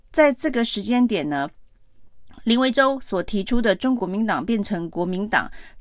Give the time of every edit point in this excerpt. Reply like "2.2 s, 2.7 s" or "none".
4.0 s